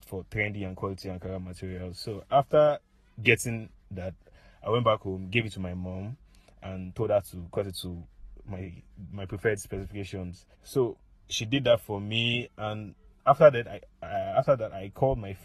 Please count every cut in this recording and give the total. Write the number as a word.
one